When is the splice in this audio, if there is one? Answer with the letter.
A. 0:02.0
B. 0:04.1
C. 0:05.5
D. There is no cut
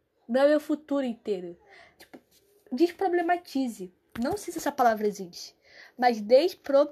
A